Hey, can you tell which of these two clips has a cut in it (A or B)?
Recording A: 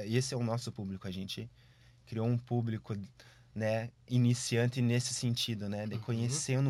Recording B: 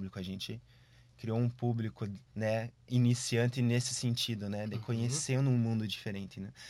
B